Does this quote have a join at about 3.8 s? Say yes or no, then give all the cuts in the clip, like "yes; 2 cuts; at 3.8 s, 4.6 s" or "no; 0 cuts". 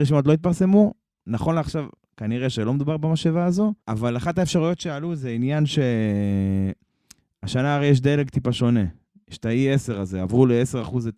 yes; 1 cut; at 3.8 s